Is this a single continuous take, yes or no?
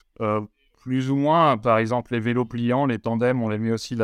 yes